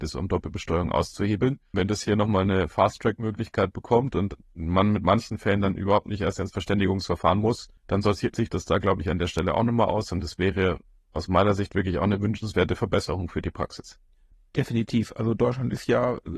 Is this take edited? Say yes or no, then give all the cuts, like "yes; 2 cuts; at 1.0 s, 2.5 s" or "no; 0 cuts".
no; 0 cuts